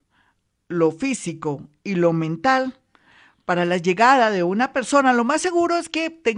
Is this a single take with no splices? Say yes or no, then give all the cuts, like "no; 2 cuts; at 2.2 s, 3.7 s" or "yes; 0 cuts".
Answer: yes; 0 cuts